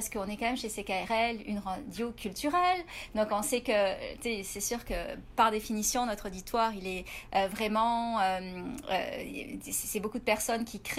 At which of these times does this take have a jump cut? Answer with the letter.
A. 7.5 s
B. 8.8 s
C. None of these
C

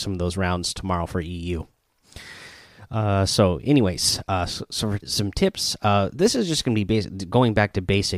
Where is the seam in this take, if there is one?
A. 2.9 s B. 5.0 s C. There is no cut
B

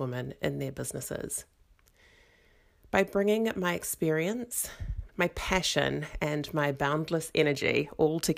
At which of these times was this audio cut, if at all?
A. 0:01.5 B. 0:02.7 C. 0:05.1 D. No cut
C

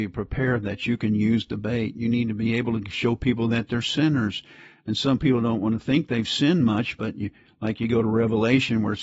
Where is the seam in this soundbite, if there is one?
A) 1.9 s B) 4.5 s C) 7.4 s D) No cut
D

